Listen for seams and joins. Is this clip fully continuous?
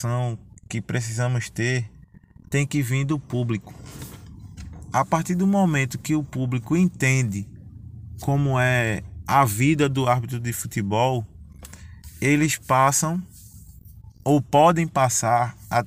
yes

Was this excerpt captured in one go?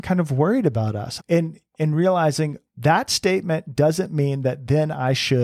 no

